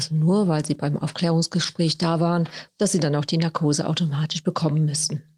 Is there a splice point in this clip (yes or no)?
yes